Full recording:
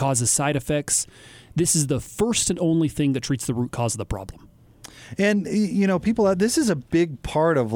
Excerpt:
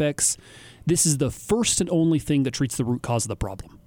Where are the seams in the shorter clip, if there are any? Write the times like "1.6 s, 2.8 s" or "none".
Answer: none